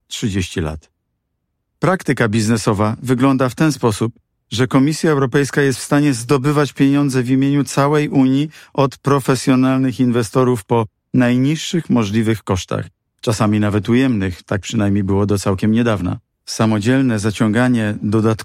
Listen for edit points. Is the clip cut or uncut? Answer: uncut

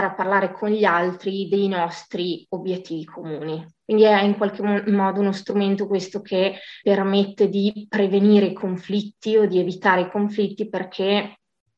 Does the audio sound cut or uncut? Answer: cut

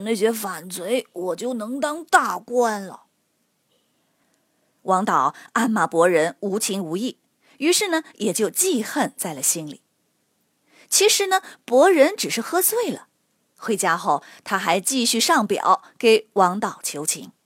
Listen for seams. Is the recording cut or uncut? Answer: uncut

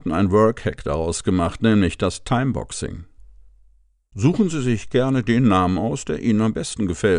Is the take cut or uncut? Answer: uncut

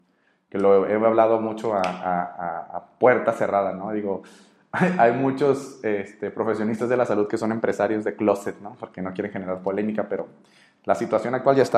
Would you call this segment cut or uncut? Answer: uncut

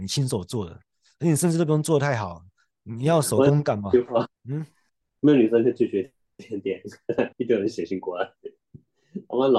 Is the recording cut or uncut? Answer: cut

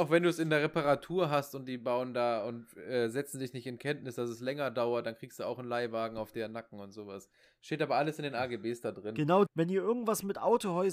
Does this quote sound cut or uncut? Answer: cut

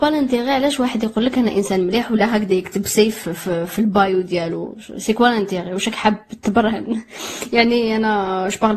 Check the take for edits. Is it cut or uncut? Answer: uncut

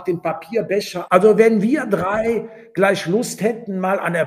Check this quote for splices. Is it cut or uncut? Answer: cut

